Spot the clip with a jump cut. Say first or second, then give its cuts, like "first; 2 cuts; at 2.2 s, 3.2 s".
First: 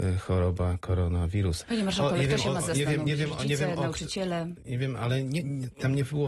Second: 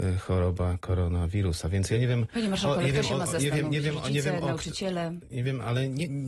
first; 1 cut; at 1.6 s